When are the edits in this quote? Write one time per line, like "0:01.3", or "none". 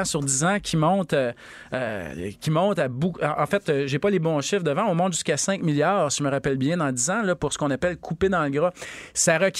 none